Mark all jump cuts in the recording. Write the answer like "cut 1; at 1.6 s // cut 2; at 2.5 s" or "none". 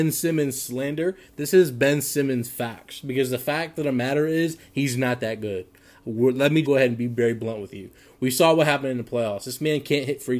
cut 1; at 6.6 s